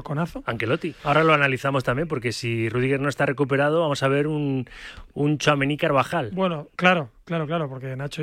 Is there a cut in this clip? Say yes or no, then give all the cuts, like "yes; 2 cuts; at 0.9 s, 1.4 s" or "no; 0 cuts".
yes; 1 cut; at 1.0 s